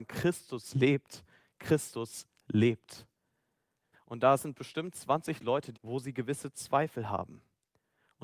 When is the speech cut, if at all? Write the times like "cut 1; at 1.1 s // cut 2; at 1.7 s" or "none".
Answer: cut 1; at 3.9 s // cut 2; at 5.7 s